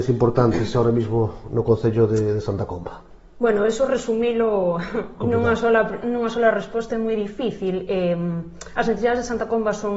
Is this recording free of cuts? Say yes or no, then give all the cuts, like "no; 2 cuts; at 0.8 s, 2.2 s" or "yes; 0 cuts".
yes; 0 cuts